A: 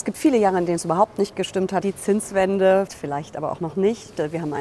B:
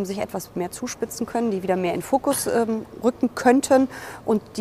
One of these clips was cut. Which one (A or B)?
A